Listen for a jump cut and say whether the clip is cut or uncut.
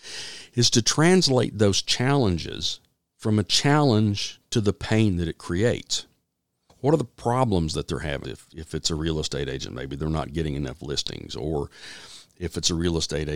cut